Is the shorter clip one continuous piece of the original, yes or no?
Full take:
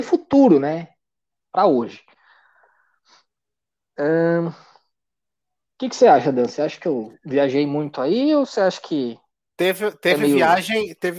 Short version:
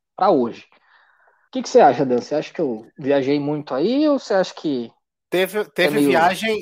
no